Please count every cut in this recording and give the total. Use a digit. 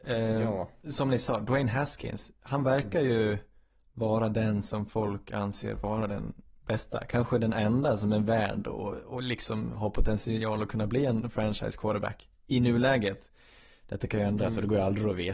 0